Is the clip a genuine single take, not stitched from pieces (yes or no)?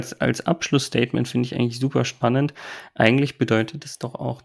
yes